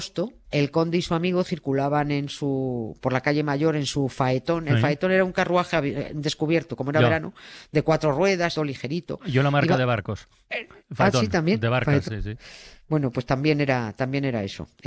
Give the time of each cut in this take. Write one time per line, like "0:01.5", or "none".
0:08.6
0:12.1